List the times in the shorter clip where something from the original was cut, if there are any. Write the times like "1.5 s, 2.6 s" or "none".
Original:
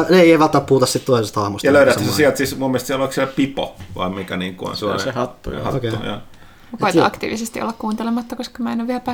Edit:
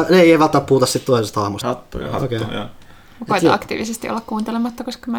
1.6 s